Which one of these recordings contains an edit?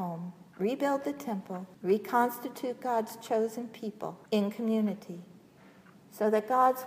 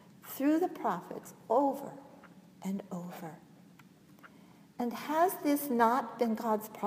first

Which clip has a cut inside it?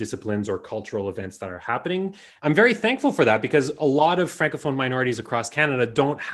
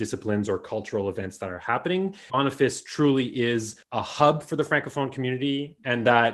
second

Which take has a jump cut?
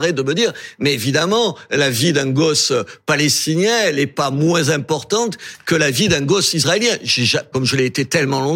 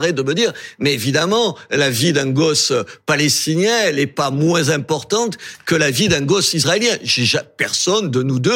first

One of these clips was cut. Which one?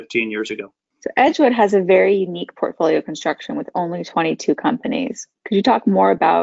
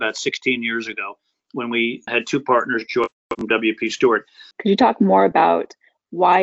second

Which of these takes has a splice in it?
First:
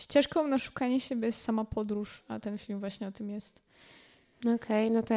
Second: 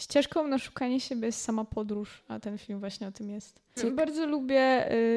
second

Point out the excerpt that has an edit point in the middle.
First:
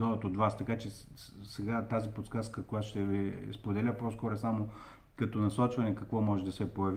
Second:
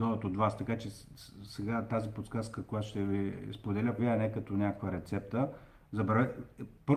second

